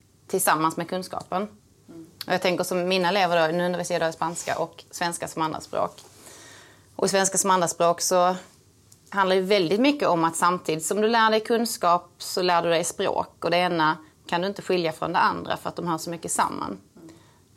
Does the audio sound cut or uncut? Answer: uncut